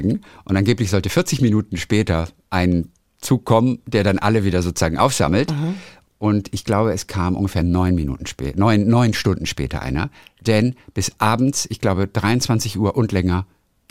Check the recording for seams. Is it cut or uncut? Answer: uncut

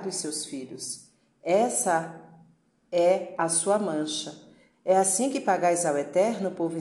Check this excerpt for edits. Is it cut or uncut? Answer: cut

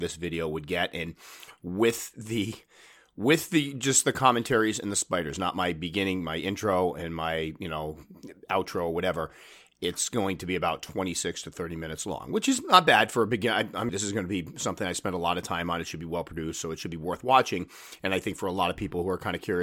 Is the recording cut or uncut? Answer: cut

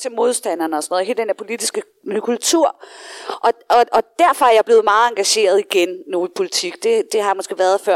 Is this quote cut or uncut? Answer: uncut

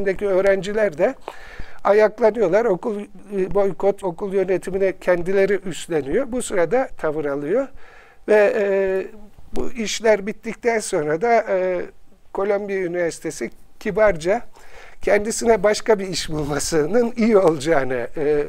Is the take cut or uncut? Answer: cut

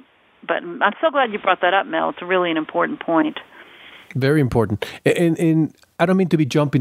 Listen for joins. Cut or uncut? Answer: uncut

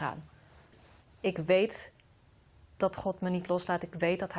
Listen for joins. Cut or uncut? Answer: uncut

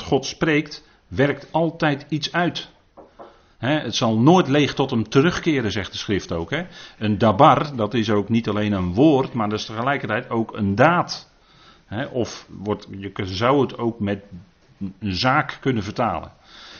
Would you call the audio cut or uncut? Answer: uncut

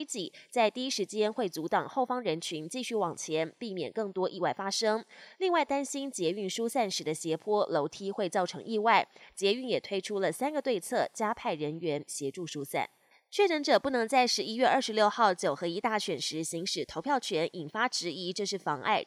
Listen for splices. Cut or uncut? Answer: uncut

